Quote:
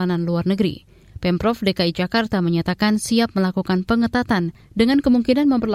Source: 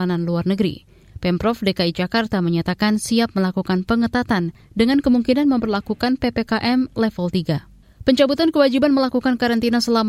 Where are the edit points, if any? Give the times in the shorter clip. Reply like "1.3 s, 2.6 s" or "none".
none